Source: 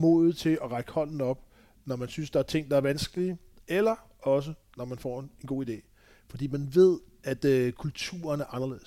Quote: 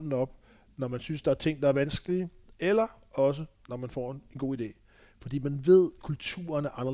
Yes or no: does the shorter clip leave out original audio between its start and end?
yes